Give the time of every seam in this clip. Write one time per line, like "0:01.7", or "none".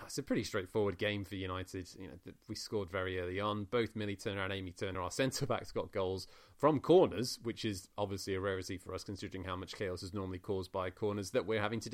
none